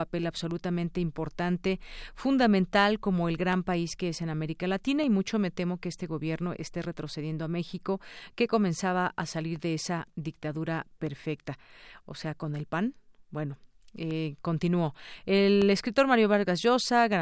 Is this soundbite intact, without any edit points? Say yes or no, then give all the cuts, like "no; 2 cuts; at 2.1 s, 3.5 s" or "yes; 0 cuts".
yes; 0 cuts